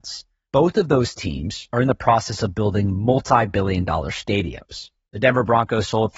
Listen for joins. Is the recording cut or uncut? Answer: cut